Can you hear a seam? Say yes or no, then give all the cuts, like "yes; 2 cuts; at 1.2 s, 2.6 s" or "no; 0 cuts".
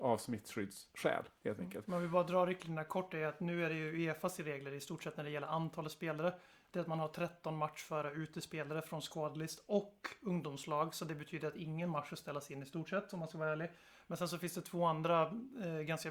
no; 0 cuts